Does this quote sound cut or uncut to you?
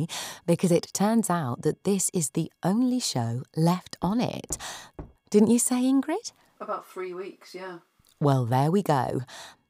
cut